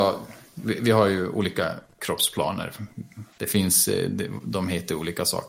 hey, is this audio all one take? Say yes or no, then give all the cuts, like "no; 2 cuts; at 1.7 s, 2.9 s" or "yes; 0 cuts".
no; 1 cut; at 3.3 s